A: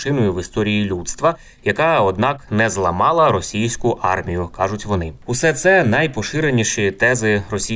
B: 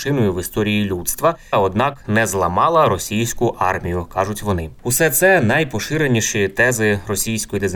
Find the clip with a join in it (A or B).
B